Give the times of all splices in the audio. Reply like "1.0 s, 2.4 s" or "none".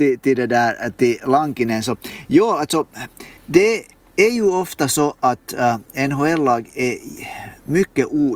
3.4 s